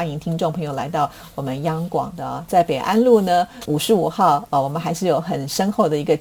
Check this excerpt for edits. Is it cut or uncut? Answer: cut